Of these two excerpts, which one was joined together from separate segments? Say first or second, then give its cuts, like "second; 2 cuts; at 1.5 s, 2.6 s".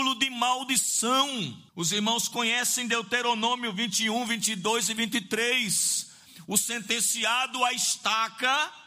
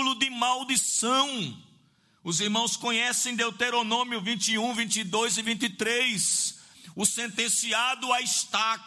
first; 1 cut; at 1.7 s